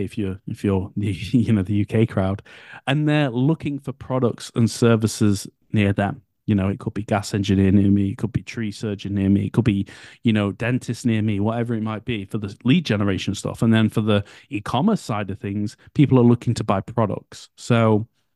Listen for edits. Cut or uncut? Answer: cut